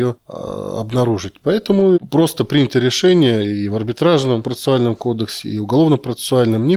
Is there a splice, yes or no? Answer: no